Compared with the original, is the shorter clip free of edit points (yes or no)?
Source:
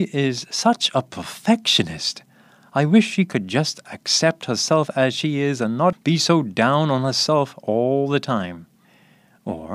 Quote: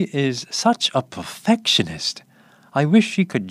yes